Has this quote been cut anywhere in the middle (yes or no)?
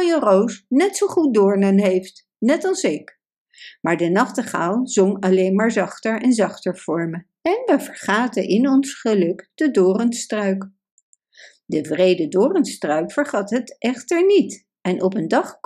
no